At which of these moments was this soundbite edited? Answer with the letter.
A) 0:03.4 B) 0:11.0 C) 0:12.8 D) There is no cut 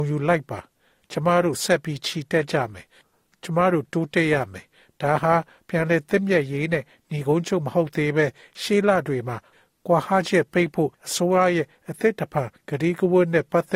B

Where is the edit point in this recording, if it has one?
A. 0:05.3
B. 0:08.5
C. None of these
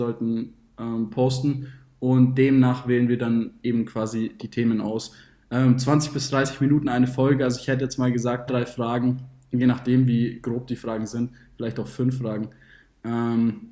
B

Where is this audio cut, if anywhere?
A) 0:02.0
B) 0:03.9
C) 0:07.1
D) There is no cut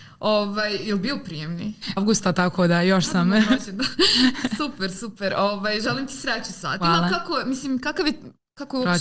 A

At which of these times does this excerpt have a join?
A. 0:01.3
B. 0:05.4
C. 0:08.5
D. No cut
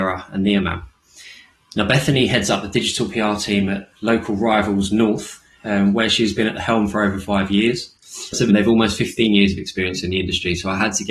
C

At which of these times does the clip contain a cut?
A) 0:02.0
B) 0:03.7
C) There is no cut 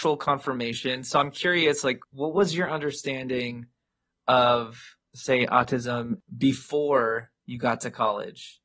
A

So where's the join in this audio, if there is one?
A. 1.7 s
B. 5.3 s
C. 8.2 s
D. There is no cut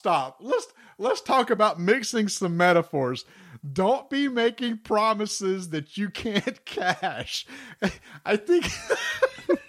D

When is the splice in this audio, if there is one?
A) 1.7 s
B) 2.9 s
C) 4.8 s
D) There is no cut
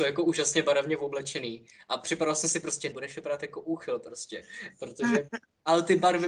B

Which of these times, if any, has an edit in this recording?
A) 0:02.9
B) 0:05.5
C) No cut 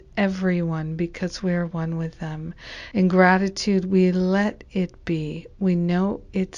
A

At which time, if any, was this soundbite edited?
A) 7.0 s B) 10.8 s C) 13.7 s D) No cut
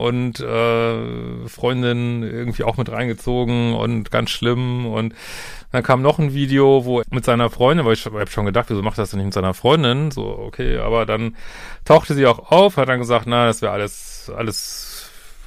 A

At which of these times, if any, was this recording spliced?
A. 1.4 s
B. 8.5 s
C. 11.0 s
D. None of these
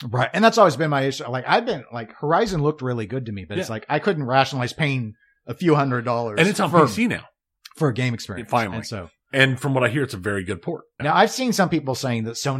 C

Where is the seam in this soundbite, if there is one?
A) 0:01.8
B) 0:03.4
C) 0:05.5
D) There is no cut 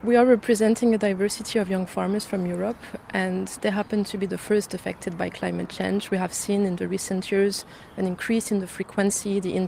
D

